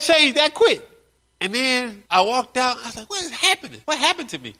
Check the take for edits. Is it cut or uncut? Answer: uncut